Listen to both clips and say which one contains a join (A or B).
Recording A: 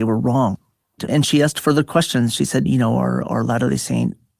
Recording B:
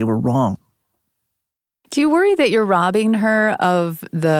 A